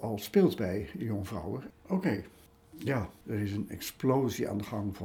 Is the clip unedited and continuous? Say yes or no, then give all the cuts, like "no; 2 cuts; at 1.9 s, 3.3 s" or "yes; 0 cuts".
no; 2 cuts; at 1.7 s, 3.2 s